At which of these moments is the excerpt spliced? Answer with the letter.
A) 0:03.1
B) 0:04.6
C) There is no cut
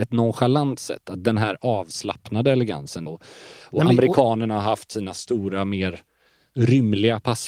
A